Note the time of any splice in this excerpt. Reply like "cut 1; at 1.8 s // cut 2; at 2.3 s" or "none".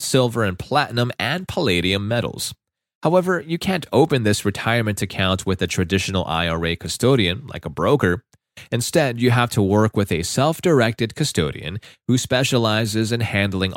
none